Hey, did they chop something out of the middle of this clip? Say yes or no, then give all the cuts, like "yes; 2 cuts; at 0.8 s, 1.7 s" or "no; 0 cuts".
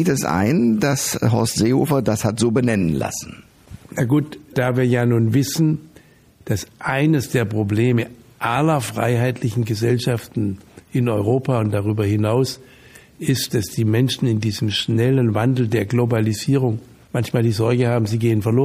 no; 0 cuts